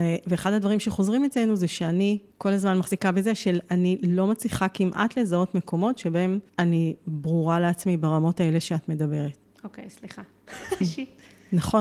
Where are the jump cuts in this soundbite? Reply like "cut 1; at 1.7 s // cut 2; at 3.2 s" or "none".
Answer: cut 1; at 10.8 s